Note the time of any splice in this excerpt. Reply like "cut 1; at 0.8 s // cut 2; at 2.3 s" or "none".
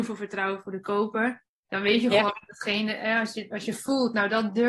cut 1; at 1.5 s